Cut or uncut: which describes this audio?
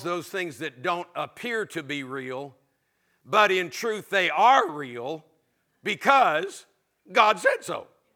uncut